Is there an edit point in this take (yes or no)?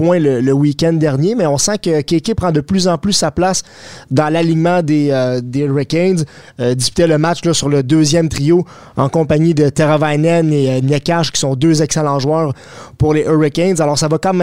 no